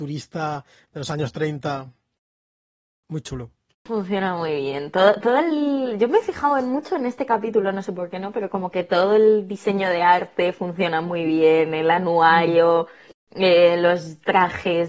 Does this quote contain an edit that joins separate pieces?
no; 0 cuts

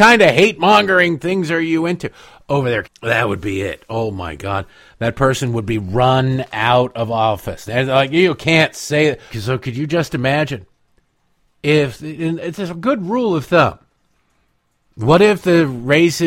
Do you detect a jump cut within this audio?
yes; 3 cuts; at 2.8 s, 7.7 s, 9.3 s

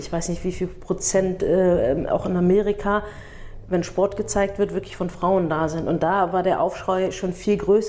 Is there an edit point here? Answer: no; 0 cuts

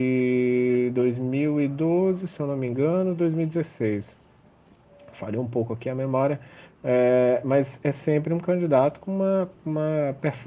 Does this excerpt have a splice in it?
no; 0 cuts

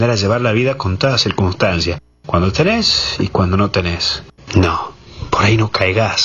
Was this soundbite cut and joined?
yes; 1 cut; at 4.4 s

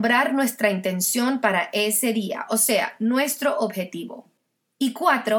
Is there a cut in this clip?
no; 0 cuts

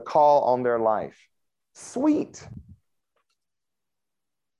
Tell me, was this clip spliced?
yes; 1 cut; at 1.6 s

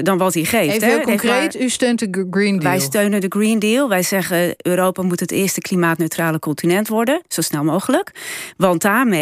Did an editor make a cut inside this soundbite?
no; 0 cuts

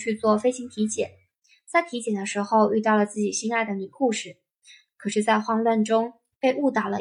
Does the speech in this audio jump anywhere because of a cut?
no; 0 cuts

